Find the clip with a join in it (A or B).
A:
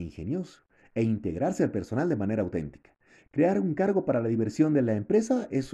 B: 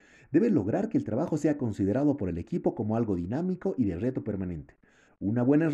A